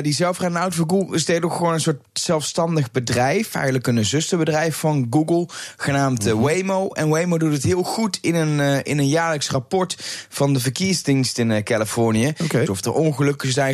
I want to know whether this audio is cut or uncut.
cut